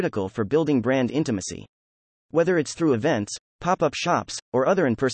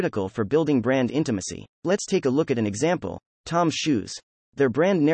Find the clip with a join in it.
second; 1 cut; at 1.8 s

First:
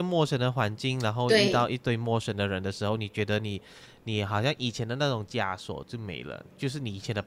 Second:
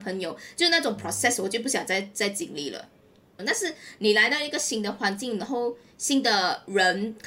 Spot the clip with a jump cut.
second; 1 cut; at 3.4 s

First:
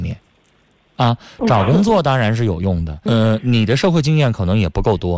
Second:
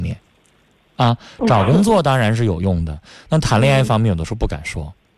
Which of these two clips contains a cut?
first; 1 cut; at 3.1 s

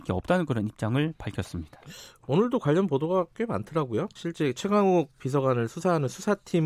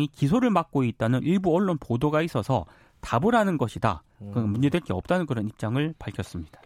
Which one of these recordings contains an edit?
first; 1 cut; at 4.2 s

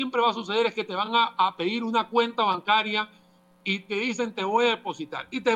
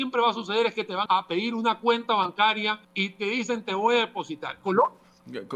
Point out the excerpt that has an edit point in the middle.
second; 3 cuts; at 1.1 s, 2.8 s, 4.6 s

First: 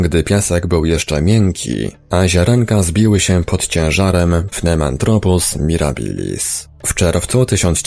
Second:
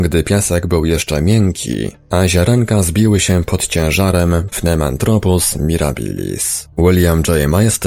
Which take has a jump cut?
second; 1 cut; at 6.7 s

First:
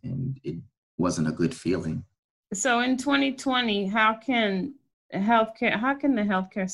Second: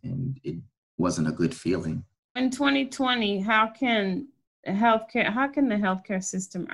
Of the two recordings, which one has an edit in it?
second; 1 cut; at 2.4 s

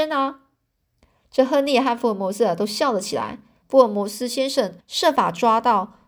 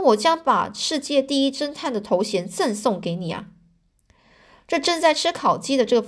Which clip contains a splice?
first; 2 cuts; at 3.6 s, 4.8 s

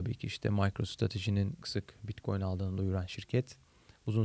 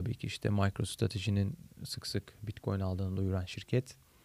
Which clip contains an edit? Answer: first; 1 cut; at 1.6 s

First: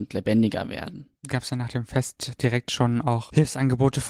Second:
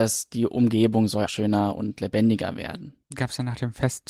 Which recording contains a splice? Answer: second; 1 cut; at 1.3 s

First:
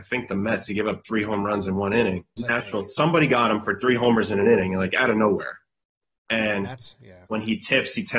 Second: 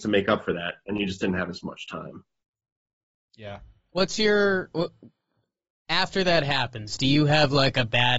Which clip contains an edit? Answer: first; 1 cut; at 2.4 s

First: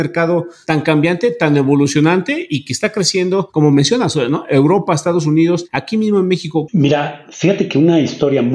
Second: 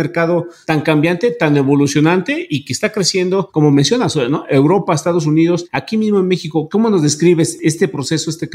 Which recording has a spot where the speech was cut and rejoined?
first; 1 cut; at 6.7 s

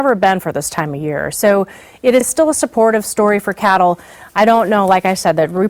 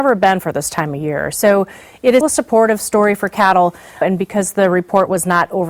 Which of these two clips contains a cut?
second; 2 cuts; at 2.2 s, 4.0 s

